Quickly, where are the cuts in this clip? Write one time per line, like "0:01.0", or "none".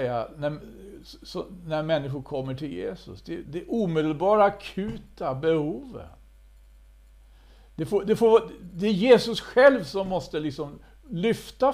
0:03.4